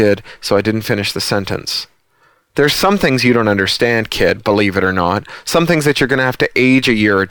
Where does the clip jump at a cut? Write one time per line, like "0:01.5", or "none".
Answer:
none